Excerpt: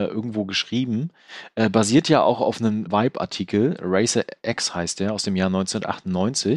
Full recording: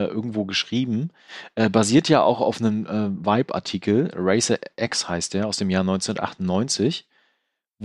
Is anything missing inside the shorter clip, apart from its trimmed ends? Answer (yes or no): yes